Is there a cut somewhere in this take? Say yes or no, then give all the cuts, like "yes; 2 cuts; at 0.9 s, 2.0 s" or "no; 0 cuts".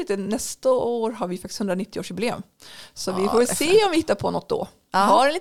no; 0 cuts